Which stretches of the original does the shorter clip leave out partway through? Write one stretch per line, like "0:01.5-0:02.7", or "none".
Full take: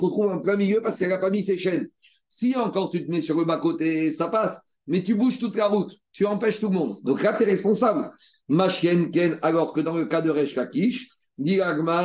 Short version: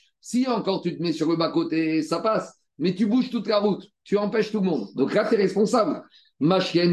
none